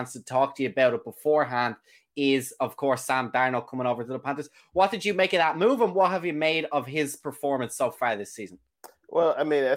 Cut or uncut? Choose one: uncut